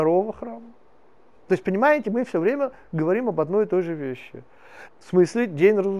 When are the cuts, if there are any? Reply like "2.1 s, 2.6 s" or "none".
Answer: 1.4 s, 4.9 s